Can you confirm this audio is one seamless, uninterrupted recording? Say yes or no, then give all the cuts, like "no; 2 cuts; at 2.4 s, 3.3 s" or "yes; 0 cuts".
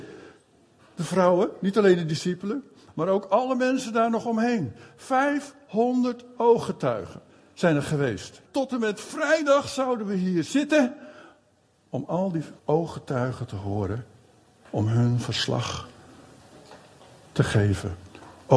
no; 2 cuts; at 8.5 s, 12.6 s